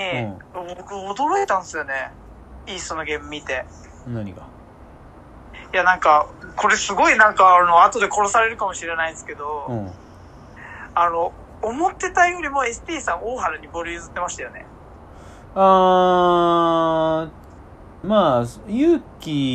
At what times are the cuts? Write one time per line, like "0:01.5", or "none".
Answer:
0:18.0